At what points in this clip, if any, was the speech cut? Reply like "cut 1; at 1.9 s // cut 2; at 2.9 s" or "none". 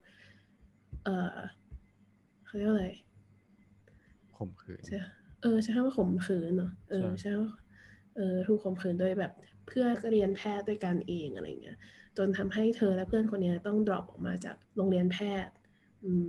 cut 1; at 9.9 s // cut 2; at 14.6 s